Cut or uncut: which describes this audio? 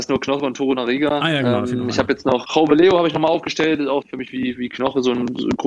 cut